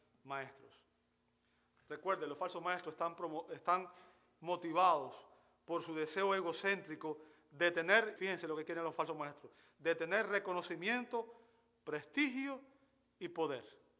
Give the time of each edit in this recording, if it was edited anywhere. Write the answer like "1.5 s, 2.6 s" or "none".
8.2 s